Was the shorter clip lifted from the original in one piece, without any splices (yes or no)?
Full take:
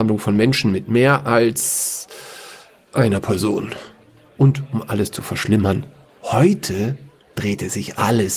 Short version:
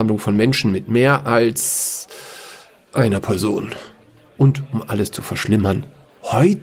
yes